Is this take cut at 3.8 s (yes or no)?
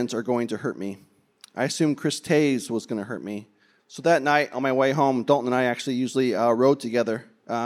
yes